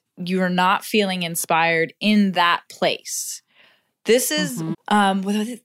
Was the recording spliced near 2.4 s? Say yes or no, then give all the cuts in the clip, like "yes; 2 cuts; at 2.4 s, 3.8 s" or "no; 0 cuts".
no; 1 cut; at 4.7 s